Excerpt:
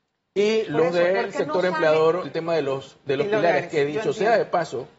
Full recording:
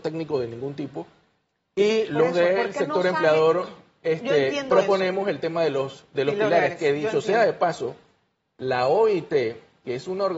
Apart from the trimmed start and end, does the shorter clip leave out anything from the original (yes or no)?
yes